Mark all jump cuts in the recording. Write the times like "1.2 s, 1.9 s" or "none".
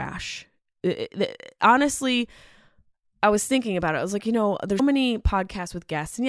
4.8 s